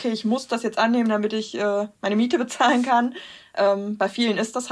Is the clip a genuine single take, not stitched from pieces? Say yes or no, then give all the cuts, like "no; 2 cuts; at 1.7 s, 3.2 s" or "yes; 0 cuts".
yes; 0 cuts